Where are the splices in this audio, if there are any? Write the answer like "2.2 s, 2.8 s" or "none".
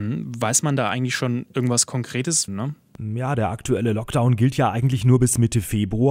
2.5 s